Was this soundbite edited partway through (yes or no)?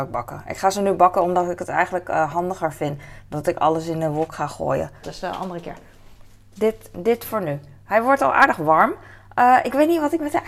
yes